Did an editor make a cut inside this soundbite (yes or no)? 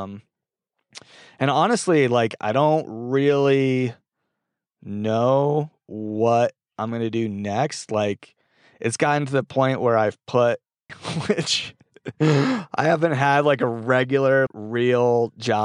yes